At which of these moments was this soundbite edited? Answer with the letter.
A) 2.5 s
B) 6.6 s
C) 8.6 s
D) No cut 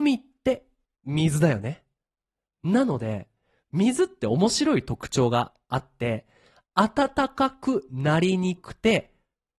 C